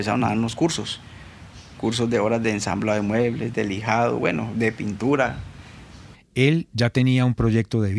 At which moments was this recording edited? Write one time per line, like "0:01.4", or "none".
0:06.1